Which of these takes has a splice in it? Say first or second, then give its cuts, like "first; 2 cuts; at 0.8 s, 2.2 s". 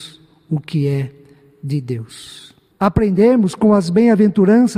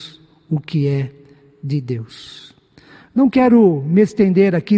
first; 1 cut; at 2.7 s